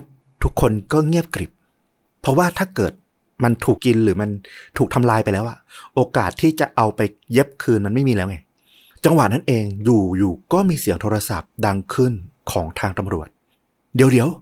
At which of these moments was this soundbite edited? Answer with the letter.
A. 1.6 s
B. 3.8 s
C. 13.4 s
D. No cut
B